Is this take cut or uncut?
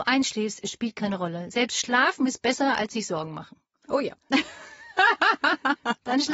uncut